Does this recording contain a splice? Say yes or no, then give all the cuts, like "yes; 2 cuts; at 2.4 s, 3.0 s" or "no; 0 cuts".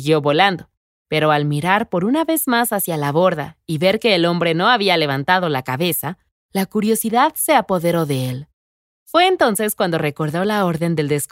no; 0 cuts